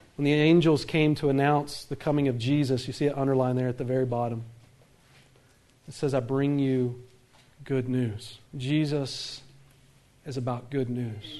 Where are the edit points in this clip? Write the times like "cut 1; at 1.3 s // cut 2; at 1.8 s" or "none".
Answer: cut 1; at 8.5 s